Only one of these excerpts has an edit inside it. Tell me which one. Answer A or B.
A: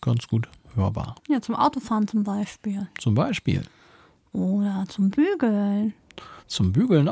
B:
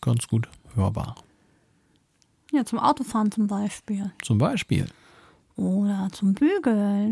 A